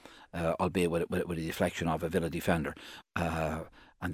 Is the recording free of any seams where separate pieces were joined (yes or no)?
no